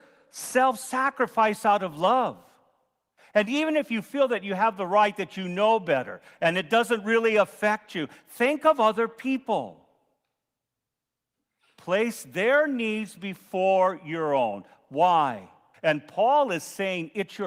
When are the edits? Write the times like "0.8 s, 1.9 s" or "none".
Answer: 15.7 s